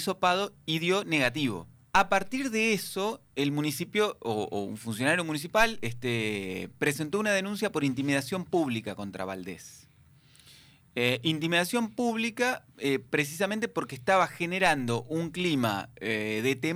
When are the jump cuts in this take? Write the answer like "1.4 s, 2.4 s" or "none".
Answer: 1.8 s